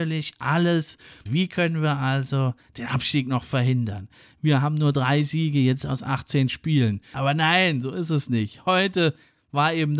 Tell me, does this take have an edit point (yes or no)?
yes